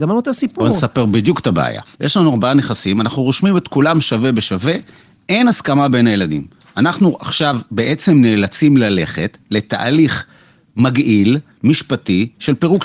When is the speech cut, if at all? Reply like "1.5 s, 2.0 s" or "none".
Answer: 1.9 s